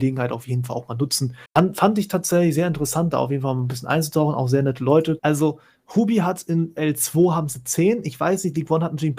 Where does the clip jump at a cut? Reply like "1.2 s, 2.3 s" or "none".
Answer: 1.5 s, 5.2 s